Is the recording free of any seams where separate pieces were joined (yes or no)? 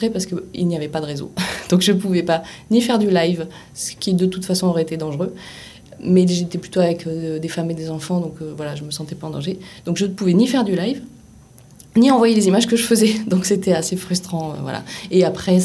yes